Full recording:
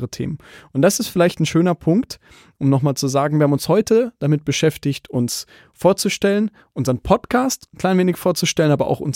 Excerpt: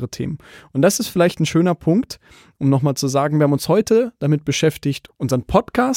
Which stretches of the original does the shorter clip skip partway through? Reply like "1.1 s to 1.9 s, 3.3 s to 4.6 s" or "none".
5.1 s to 6.6 s